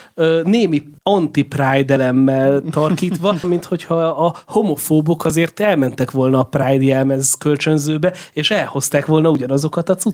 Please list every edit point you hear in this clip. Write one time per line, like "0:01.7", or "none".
0:01.0
0:03.4

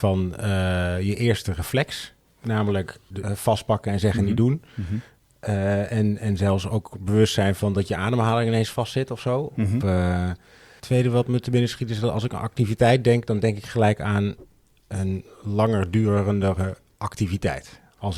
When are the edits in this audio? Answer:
0:03.2

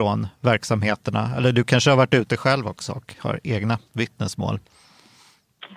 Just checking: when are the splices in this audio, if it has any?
none

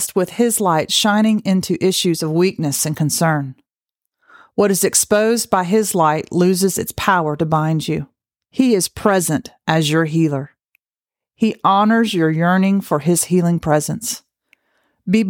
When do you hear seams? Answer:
0:08.5

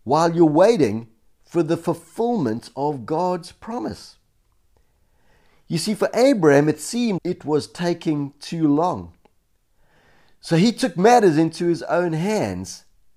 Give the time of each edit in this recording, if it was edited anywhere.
0:07.2

